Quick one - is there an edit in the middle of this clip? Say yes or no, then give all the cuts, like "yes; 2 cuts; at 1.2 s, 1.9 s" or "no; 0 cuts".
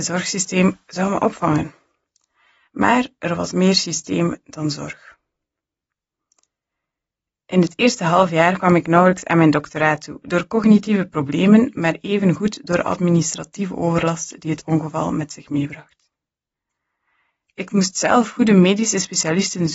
no; 0 cuts